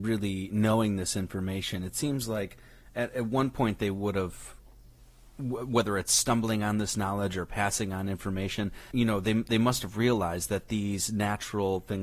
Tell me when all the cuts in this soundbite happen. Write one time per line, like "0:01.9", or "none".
0:08.9